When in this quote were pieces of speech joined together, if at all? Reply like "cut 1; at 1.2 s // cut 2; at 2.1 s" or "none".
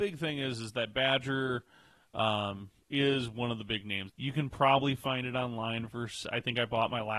cut 1; at 4.1 s